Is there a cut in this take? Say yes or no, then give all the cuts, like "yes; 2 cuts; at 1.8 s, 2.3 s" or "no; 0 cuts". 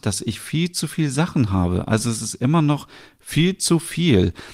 no; 0 cuts